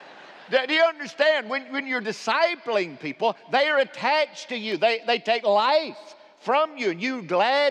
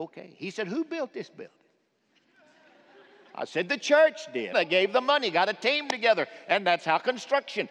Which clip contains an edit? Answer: second; 1 cut; at 4.5 s

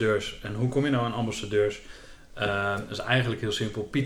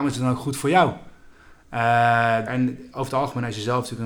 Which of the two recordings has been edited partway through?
second; 1 cut; at 2.5 s

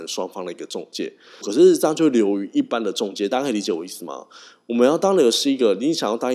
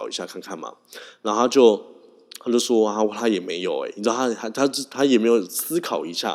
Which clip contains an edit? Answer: first; 1 cut; at 1.4 s

